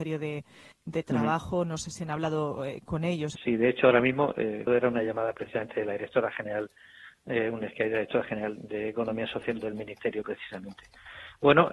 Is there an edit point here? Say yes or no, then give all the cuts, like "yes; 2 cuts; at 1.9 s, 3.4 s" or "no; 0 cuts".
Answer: yes; 3 cuts; at 3.4 s, 4.7 s, 8.6 s